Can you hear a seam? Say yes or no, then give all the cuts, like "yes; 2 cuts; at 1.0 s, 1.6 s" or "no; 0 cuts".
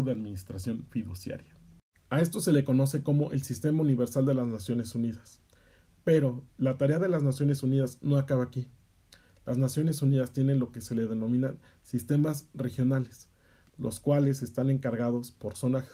yes; 1 cut; at 2.0 s